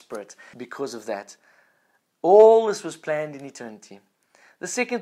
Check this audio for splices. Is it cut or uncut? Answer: uncut